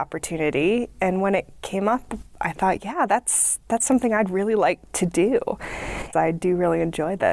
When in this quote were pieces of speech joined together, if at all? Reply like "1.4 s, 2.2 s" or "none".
6.1 s